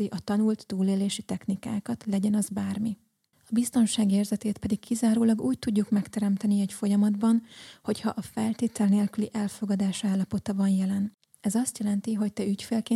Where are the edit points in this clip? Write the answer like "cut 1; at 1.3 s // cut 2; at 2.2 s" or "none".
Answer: cut 1; at 3.3 s